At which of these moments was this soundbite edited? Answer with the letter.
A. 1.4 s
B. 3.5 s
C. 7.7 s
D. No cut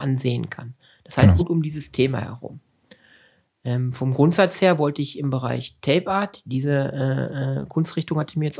A